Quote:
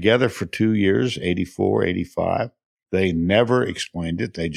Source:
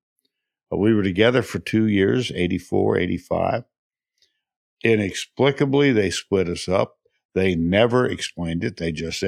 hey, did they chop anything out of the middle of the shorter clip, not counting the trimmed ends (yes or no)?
yes